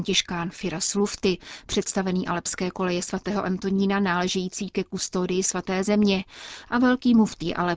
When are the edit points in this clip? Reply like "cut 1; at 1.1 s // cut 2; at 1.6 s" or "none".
none